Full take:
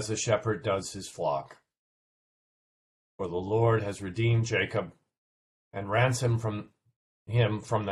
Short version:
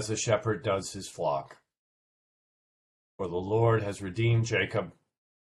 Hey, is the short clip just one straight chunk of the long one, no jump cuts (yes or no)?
yes